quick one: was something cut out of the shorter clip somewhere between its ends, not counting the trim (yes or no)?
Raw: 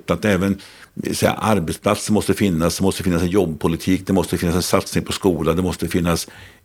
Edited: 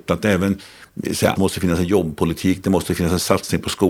yes